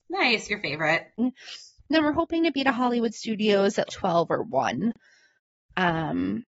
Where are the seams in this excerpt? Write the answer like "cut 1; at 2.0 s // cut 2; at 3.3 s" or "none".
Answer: cut 1; at 1.2 s // cut 2; at 3.9 s

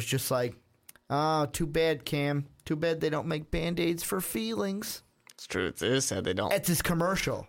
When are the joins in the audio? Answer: none

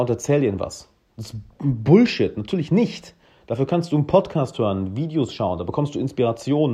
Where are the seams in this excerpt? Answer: none

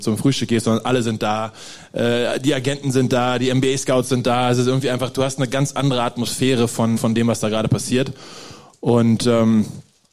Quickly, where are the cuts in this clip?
cut 1; at 7.0 s

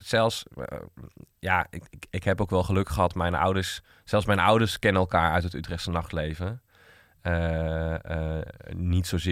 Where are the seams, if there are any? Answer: none

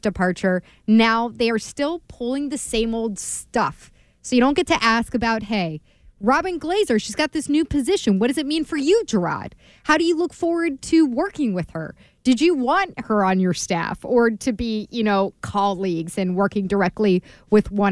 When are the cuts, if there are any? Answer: none

